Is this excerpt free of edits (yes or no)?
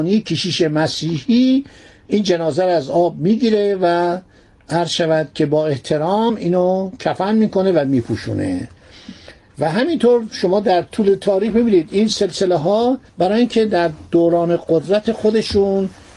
no